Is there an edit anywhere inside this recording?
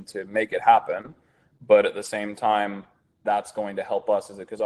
yes; 1 cut; at 3.2 s

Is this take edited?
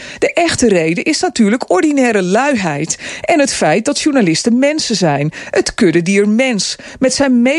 no; 0 cuts

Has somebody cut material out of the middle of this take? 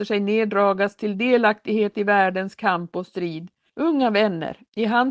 yes; 1 cut; at 3.7 s

